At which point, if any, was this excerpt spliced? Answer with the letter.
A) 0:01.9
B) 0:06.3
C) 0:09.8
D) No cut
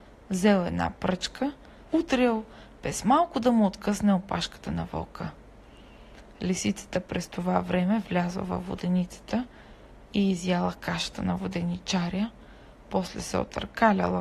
A